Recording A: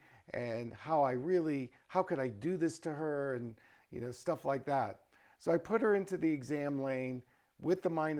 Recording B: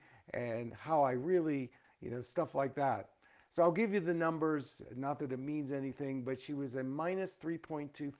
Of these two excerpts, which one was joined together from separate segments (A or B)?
B